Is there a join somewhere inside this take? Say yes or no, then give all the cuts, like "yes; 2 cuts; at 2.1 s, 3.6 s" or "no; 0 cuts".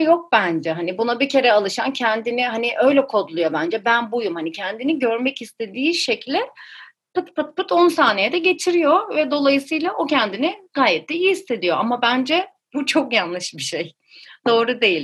no; 0 cuts